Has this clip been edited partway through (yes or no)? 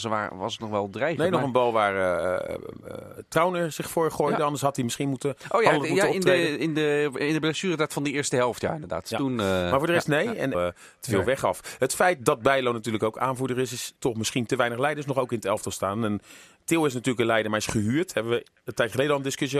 yes